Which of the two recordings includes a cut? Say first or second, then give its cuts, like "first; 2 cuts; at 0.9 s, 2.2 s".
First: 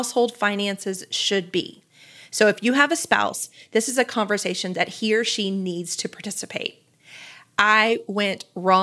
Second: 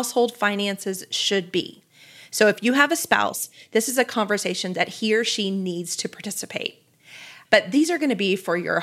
second; 1 cut; at 7.5 s